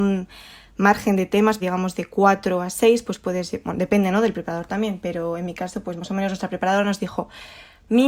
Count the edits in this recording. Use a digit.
1